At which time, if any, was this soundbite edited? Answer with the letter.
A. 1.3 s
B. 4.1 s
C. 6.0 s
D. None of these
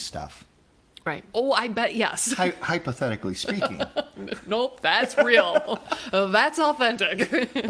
A